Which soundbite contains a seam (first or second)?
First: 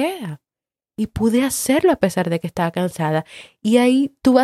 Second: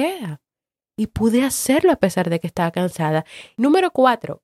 second